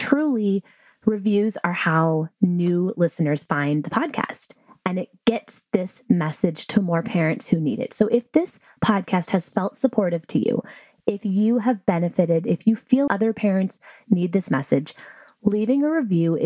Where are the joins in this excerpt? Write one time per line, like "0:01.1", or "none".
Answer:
0:13.1